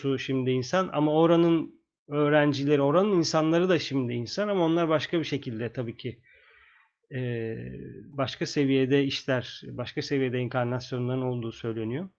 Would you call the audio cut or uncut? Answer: uncut